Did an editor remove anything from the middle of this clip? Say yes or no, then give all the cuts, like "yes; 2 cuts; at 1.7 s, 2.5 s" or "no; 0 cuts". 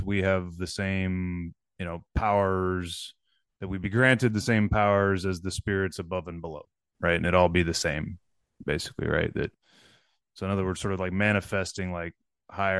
no; 0 cuts